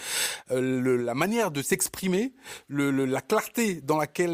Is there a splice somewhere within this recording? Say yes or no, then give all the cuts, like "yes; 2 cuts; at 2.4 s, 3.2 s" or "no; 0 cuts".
no; 0 cuts